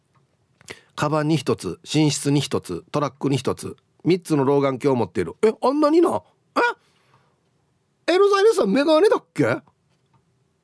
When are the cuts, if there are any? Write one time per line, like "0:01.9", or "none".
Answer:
none